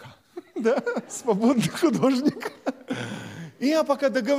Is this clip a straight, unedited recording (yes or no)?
no